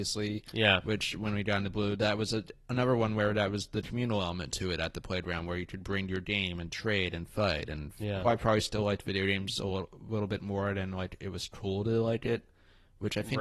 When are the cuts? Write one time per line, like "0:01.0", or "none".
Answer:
0:08.2

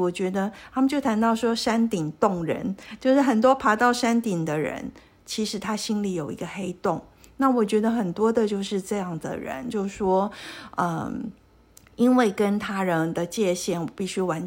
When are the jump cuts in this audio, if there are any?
none

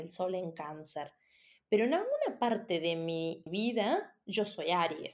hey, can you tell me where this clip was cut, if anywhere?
0:03.5

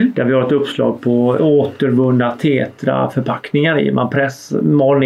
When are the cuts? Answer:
0:01.4

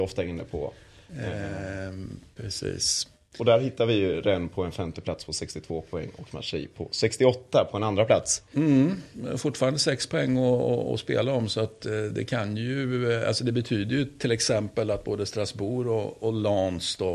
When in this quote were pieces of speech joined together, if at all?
none

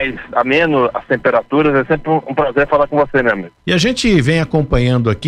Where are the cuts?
0:03.6

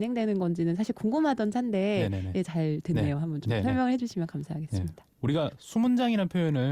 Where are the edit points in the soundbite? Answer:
none

